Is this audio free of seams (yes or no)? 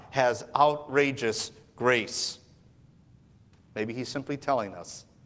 no